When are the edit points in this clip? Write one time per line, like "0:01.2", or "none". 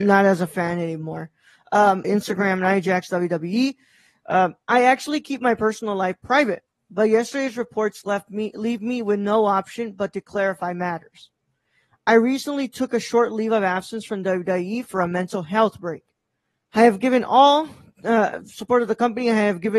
0:02.0
0:16.6